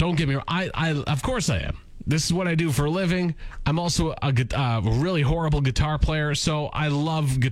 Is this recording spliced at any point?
no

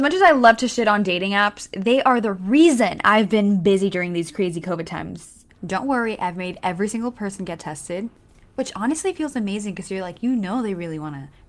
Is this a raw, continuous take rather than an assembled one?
yes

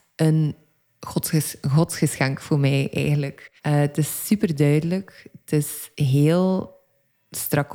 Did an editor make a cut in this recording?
yes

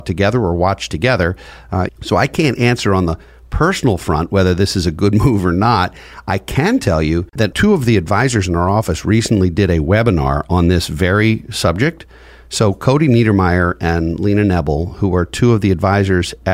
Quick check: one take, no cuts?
no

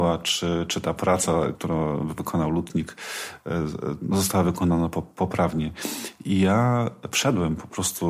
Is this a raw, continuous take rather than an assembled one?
no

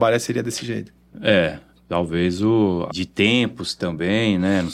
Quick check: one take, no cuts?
no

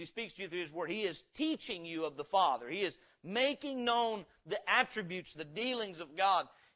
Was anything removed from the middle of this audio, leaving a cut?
yes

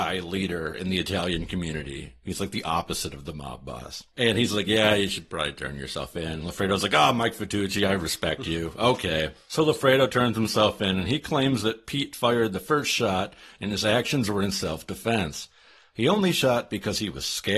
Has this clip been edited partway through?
no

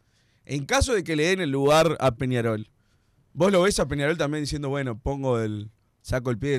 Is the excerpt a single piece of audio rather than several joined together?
yes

